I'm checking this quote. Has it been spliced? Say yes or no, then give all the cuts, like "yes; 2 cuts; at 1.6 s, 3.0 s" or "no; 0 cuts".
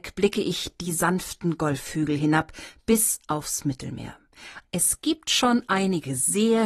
yes; 1 cut; at 4.6 s